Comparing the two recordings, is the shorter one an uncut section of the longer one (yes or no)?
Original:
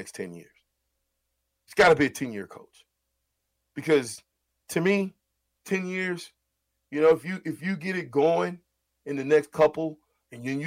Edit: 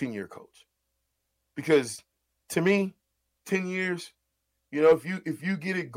yes